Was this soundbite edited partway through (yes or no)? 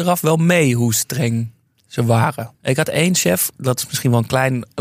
yes